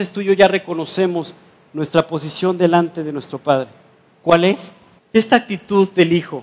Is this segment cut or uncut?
cut